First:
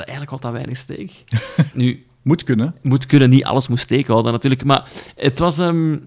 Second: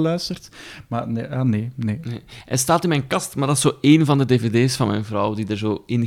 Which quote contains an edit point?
first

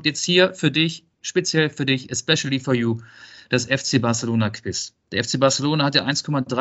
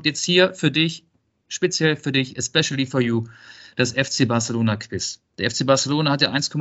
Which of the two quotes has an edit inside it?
first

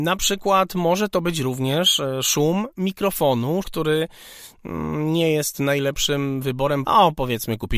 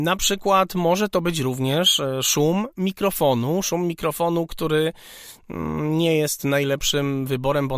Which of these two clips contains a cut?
first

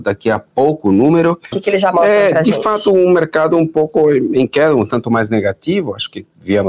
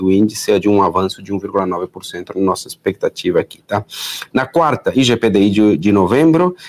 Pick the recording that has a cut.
first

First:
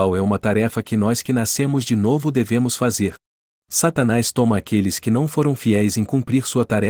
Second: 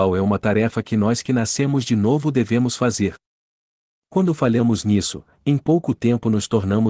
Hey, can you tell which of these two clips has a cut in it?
first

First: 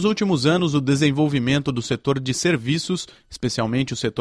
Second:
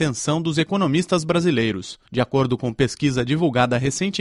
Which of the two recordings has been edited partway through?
second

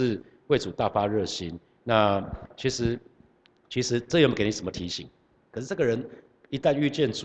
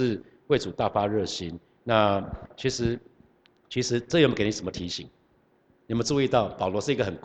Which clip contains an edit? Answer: first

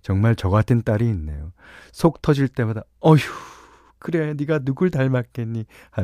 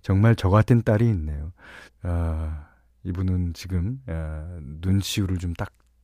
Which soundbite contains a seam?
second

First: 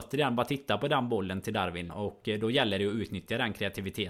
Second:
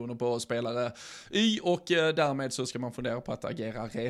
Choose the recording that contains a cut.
first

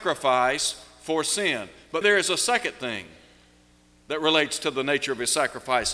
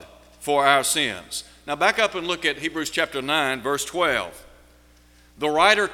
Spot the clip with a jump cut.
first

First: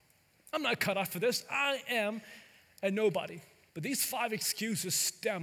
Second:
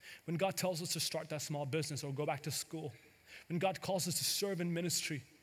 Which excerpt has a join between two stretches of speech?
first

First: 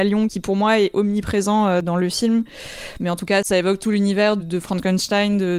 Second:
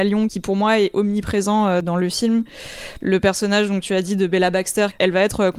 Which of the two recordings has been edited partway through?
first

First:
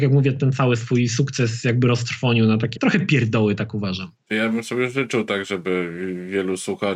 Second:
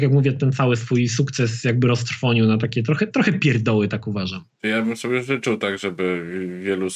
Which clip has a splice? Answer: first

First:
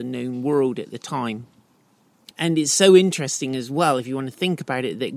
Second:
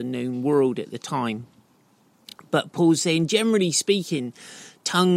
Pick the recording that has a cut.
first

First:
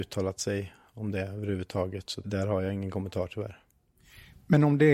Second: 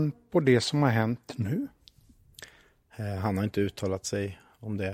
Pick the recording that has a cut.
first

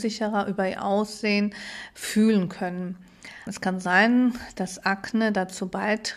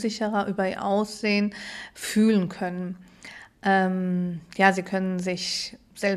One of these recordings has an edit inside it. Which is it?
first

